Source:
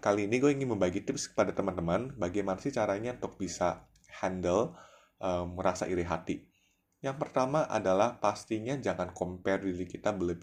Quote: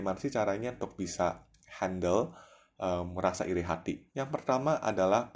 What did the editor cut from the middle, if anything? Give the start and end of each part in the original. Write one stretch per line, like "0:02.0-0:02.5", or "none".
0:06.5-0:07.0